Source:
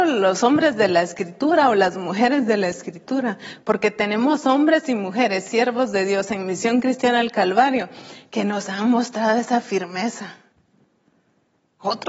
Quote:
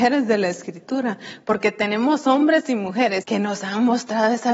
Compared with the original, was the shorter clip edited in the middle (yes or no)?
yes